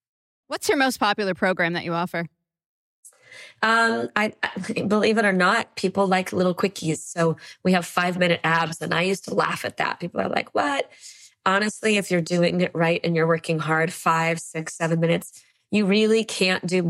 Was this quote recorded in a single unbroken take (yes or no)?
yes